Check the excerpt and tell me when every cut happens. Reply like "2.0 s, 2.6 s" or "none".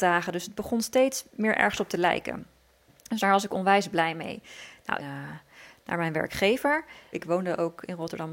5.0 s, 7.1 s